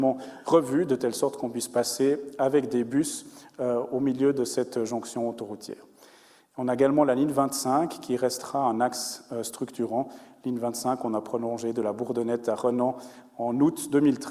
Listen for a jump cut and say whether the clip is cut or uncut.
uncut